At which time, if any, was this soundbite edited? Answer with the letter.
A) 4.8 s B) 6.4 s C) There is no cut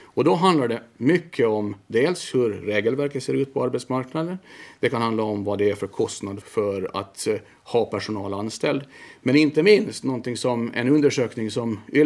B